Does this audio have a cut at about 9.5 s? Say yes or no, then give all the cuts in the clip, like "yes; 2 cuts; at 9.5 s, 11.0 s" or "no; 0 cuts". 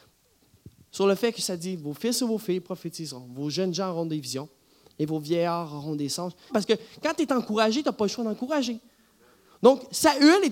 no; 1 cut; at 6.5 s